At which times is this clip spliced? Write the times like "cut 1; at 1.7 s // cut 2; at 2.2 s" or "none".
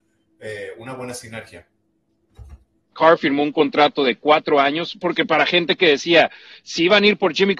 cut 1; at 2.9 s